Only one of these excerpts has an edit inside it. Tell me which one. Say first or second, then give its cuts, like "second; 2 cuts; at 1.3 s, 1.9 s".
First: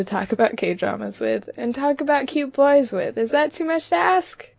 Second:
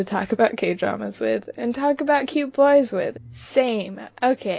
second; 1 cut; at 3.1 s